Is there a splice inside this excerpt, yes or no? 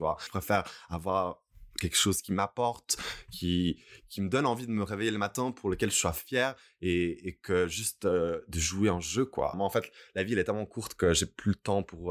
yes